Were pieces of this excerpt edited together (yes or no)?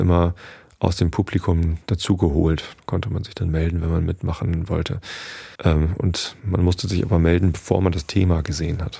yes